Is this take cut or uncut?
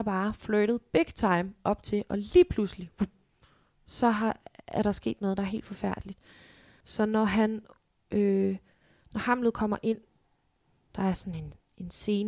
cut